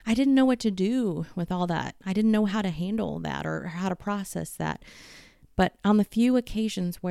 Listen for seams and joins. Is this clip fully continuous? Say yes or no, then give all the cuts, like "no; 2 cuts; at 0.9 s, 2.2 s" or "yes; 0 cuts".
yes; 0 cuts